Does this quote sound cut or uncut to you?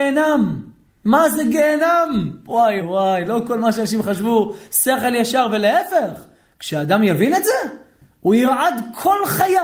cut